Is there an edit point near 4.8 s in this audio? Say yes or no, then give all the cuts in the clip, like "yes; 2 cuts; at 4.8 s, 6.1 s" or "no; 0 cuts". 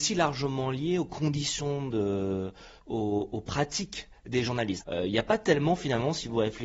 yes; 1 cut; at 4.8 s